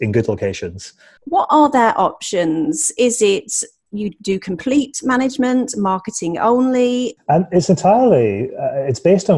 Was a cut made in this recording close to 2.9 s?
no; 2 cuts; at 1.2 s, 7.2 s

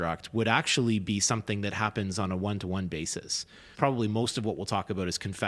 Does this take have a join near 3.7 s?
yes; 1 cut; at 3.7 s

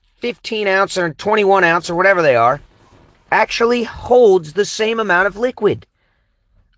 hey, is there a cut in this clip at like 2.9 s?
no; 0 cuts

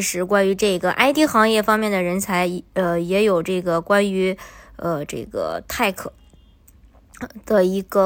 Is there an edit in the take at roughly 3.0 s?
no; 0 cuts

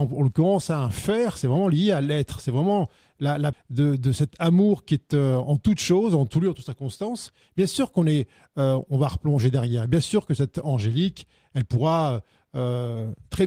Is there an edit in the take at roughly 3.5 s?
yes; 1 cut; at 3.5 s

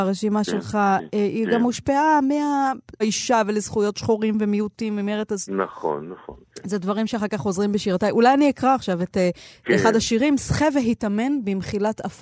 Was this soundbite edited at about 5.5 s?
yes; 2 cuts; at 3.0 s, 5.5 s

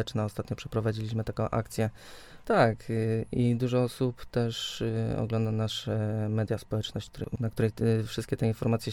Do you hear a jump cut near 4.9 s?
no; 1 cut; at 2.4 s

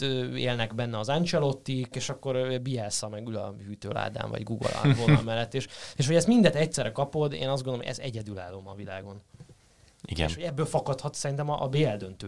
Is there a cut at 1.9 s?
yes; 1 cut; at 1.9 s

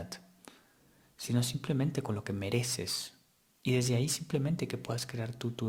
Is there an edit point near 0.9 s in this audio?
no; 1 cut; at 3.5 s

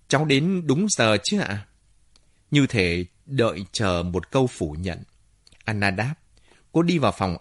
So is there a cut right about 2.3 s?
no; 1 cut; at 5.5 s

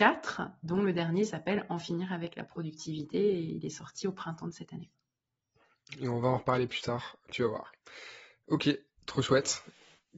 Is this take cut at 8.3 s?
no; 0 cuts

